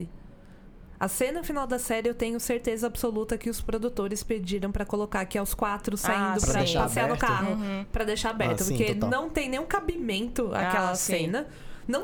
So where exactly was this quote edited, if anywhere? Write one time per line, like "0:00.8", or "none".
none